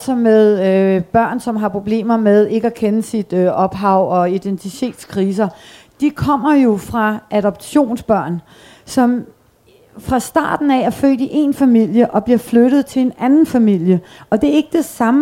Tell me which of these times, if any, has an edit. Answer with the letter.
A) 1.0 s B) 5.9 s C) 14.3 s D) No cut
D